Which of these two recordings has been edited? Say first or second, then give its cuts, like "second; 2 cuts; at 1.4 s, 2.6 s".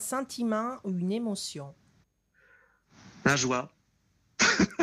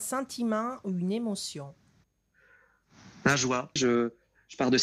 second; 1 cut; at 3.8 s